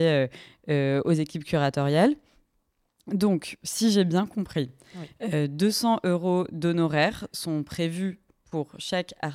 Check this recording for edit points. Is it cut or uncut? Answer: uncut